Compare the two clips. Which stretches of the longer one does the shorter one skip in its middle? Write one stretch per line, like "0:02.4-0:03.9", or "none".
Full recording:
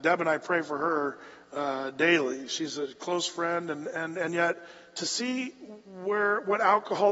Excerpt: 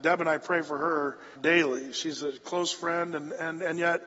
0:01.4-0:01.9